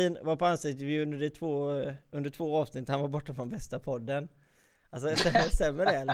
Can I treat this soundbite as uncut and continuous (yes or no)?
yes